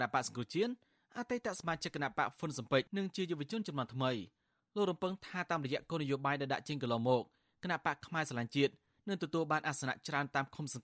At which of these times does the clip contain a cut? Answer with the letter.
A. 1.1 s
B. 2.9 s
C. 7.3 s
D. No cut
B